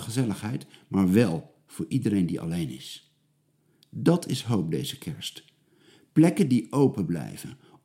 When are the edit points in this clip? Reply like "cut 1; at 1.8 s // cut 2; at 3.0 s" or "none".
none